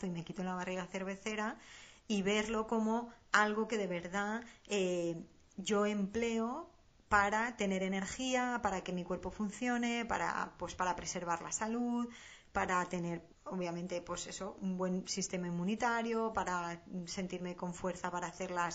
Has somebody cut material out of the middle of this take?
yes; 1 cut; at 13.3 s

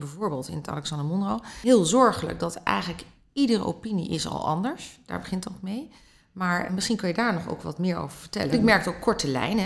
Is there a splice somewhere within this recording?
yes; 2 cuts; at 6.7 s, 8.5 s

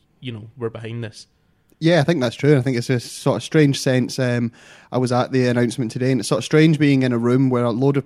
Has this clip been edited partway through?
no; 0 cuts

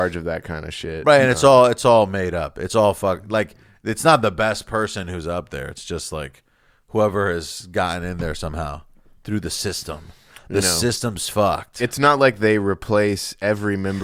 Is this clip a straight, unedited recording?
yes; 0 cuts

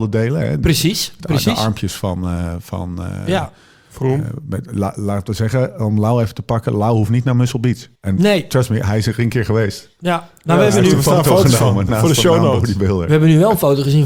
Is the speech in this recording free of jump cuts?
no; 1 cut; at 8.0 s

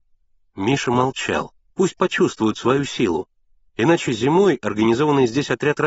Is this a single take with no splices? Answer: no; 2 cuts; at 1.7 s, 3.7 s

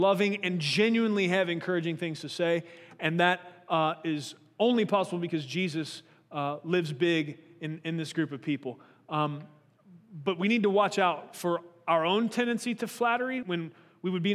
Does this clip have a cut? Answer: yes; 1 cut; at 13.4 s

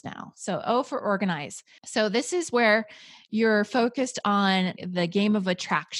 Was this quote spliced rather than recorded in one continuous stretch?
yes; 2 cuts; at 1.8 s, 4.8 s

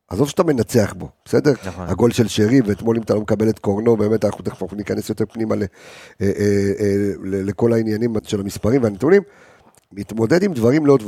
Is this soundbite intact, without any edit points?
no; 3 cuts; at 1.6 s, 8.2 s, 9.8 s

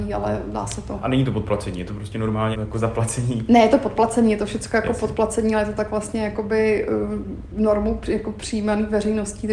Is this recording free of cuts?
no; 1 cut; at 2.5 s

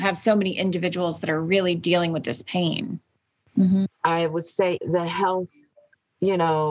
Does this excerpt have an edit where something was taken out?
yes; 2 cuts; at 3.4 s, 4.8 s

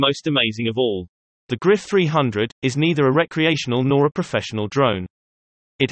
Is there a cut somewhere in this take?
yes; 2 cuts; at 1.4 s, 2.5 s

